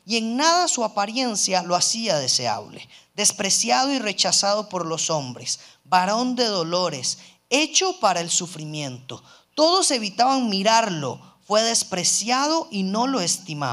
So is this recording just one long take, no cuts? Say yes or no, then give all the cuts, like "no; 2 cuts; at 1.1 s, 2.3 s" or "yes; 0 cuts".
yes; 0 cuts